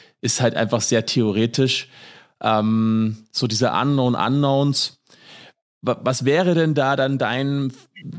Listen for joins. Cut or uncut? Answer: uncut